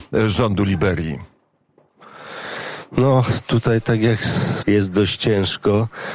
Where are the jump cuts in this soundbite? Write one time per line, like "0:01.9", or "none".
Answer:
0:04.6